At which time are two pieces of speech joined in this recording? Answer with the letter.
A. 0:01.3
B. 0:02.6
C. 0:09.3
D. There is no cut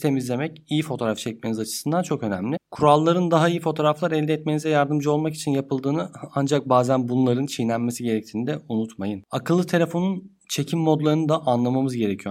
B